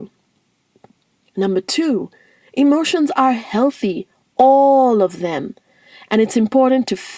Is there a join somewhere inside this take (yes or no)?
no